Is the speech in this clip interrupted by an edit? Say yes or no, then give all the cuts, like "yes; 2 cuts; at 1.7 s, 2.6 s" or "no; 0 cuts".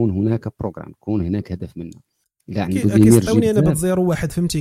no; 0 cuts